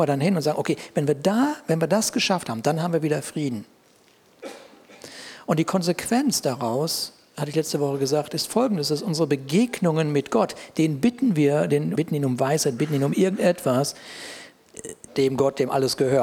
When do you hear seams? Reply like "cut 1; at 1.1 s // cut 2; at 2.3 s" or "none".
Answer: cut 1; at 12.0 s // cut 2; at 15.1 s